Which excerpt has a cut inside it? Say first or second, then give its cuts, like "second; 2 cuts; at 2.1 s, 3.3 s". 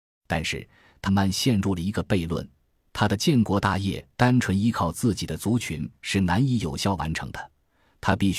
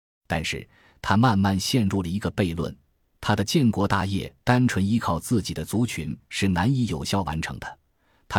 first; 1 cut; at 1.1 s